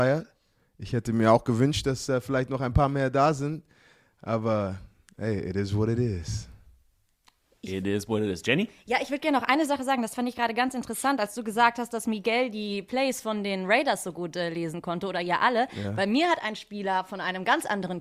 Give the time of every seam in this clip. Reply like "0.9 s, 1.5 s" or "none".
none